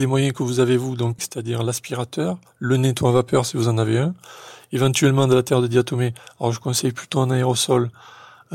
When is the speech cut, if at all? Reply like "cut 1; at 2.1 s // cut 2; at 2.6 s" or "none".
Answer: cut 1; at 1.2 s